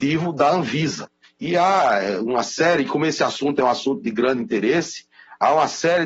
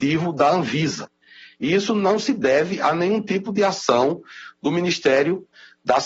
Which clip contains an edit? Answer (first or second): first